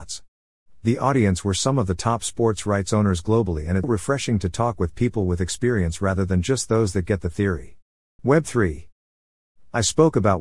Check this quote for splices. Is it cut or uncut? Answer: cut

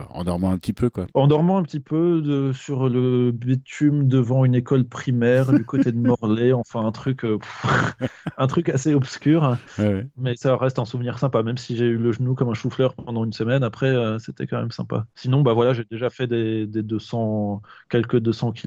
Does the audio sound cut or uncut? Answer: uncut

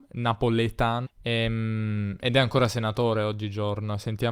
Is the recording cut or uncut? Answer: cut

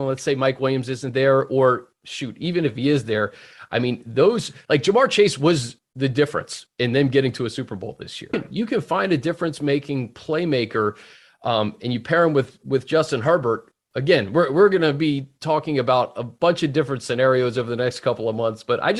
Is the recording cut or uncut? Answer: cut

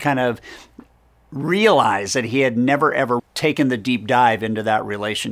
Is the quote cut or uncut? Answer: cut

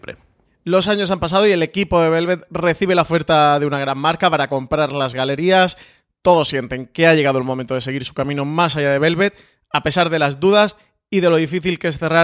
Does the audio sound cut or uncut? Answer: uncut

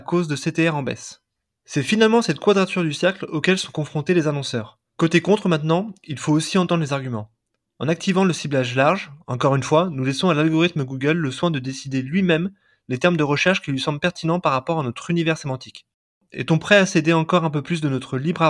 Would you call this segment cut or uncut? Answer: cut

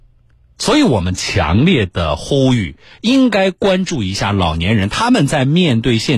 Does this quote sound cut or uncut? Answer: uncut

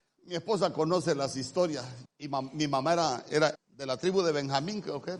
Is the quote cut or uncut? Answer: cut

